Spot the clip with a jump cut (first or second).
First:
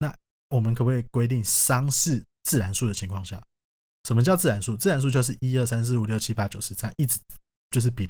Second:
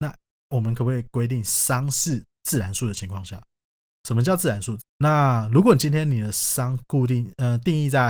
second